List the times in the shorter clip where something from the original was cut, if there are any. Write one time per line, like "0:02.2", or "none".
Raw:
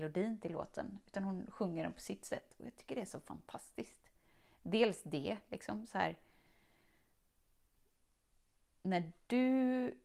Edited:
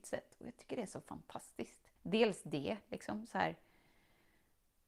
0:02.0